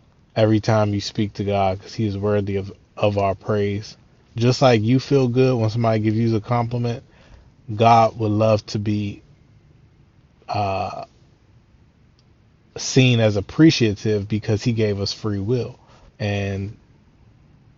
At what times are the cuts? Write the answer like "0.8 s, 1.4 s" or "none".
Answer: 4.3 s, 16.1 s